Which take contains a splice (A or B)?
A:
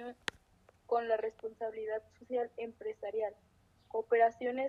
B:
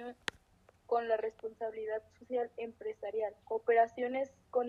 B